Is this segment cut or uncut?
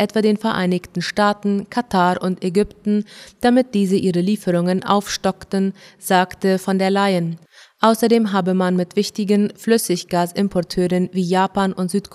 uncut